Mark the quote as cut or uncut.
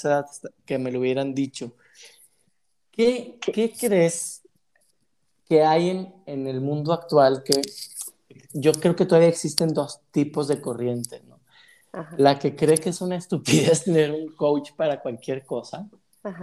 uncut